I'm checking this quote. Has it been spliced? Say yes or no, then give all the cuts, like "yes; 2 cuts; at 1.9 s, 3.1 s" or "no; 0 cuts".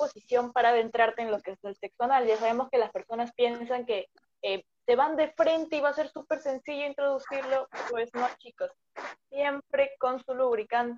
no; 0 cuts